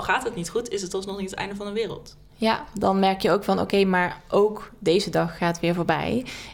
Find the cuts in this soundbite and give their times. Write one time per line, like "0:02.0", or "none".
none